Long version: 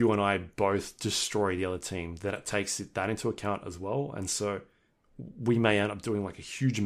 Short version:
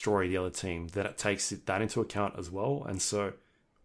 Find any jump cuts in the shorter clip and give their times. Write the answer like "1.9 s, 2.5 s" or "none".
none